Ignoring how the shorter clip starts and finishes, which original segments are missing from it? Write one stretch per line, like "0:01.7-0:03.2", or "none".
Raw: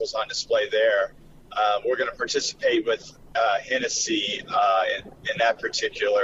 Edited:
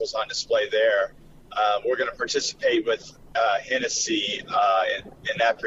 none